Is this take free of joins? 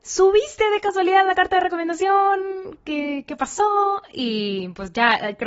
yes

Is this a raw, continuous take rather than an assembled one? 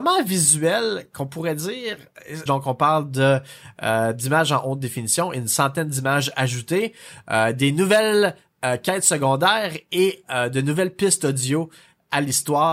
no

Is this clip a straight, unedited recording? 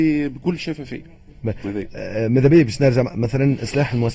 yes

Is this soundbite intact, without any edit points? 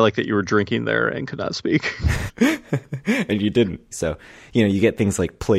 no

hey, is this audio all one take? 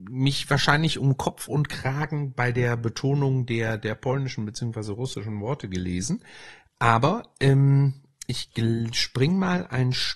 yes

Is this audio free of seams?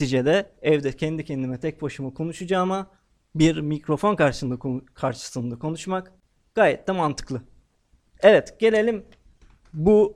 yes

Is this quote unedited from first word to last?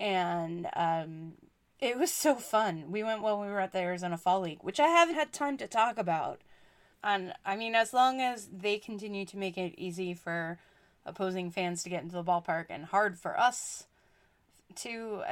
no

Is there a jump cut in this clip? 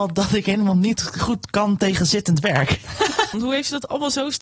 yes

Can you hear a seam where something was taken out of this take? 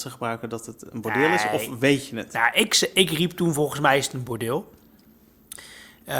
no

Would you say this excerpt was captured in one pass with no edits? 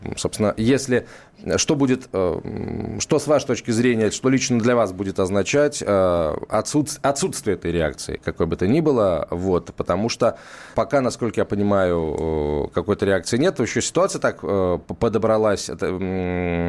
no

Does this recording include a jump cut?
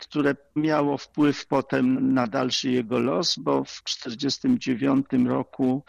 no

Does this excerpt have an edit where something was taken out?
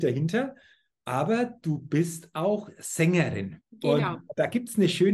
yes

